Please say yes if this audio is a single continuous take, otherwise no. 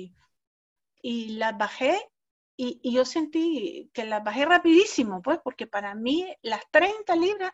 yes